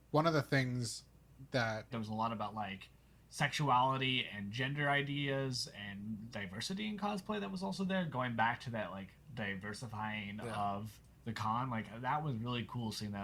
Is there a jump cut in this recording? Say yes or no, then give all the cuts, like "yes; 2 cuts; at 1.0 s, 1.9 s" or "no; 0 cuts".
yes; 1 cut; at 1.9 s